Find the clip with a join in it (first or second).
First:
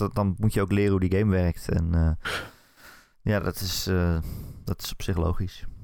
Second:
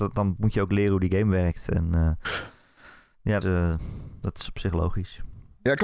second